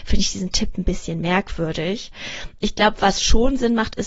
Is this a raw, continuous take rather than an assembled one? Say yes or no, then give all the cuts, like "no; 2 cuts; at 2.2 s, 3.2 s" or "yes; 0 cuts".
yes; 0 cuts